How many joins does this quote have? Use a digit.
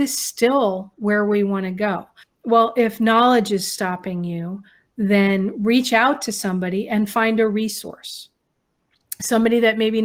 1